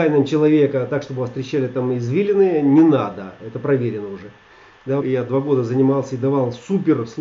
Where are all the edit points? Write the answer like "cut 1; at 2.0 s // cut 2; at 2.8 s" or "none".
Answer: cut 1; at 3.4 s // cut 2; at 5.0 s